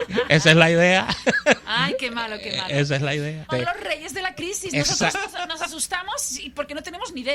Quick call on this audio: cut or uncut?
cut